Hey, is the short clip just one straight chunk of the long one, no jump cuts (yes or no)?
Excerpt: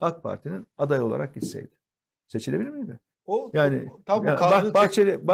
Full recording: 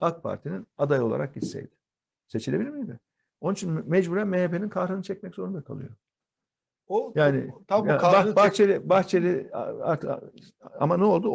no